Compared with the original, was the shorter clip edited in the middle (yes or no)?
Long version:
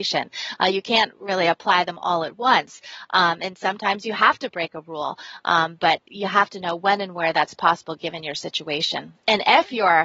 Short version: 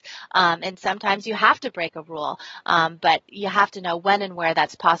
no